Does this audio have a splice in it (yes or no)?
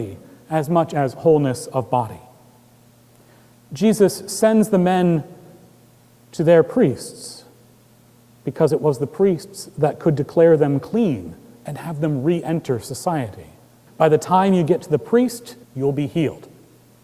yes